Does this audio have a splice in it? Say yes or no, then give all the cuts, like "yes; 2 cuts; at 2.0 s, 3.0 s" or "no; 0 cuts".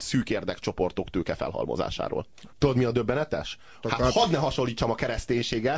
yes; 2 cuts; at 2.5 s, 3.8 s